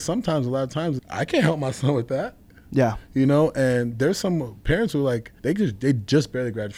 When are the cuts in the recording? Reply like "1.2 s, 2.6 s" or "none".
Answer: 1.0 s, 5.4 s